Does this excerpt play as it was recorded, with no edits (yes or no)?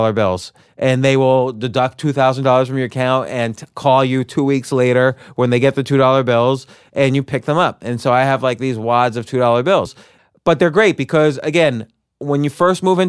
yes